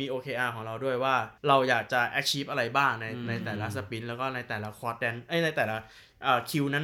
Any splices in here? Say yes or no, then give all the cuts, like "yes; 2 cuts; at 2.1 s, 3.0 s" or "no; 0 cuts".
yes; 1 cut; at 1.4 s